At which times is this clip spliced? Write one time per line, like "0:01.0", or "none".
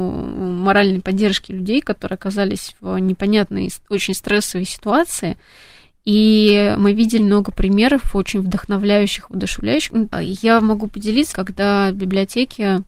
0:07.2
0:10.1
0:11.3